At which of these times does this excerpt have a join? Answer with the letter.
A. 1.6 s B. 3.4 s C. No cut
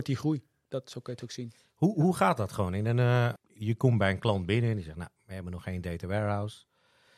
B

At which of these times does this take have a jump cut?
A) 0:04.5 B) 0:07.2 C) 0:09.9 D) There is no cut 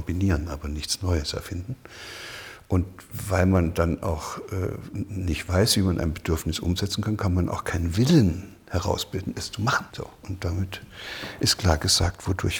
C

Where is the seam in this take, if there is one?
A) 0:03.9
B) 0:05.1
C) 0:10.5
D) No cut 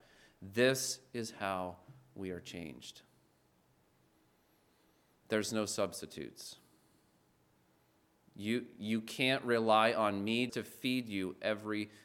C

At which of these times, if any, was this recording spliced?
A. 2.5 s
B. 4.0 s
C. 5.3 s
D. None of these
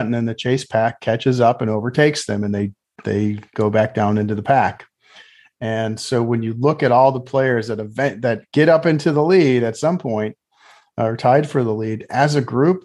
D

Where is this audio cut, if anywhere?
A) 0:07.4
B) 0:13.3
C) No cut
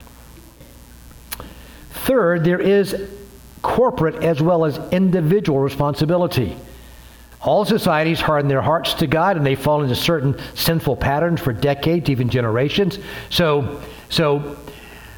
C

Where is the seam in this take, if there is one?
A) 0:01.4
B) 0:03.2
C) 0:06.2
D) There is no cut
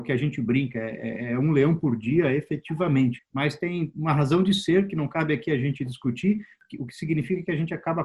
B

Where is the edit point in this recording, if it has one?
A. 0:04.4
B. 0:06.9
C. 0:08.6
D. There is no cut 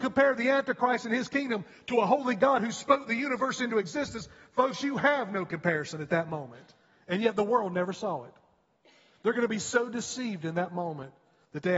D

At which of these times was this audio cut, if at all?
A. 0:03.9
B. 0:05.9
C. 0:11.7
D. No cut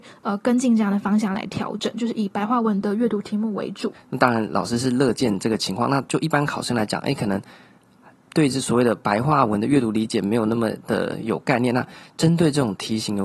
A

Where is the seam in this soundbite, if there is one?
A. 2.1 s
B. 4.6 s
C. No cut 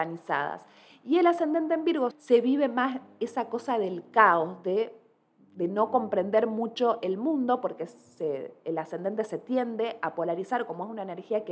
A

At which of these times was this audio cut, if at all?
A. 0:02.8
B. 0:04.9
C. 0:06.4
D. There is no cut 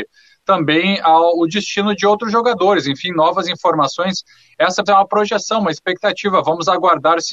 B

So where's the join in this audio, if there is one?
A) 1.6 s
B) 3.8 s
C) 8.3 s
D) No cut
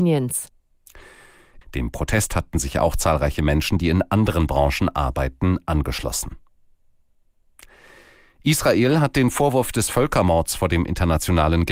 A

